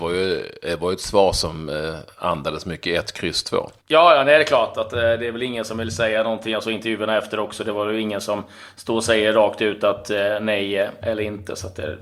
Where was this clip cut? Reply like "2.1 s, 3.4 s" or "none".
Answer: 3.8 s